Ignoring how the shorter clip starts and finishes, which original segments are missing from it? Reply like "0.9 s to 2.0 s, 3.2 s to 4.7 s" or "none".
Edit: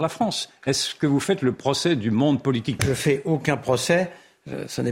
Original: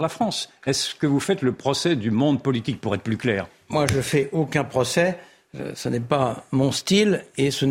2.8 s to 3.9 s